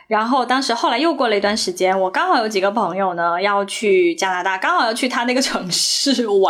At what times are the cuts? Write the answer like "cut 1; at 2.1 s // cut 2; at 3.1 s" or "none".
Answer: none